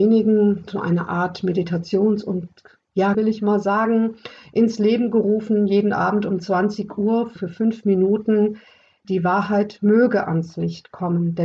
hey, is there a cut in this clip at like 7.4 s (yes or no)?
yes